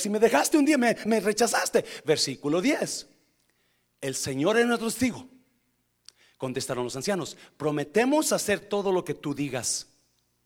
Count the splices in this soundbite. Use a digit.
1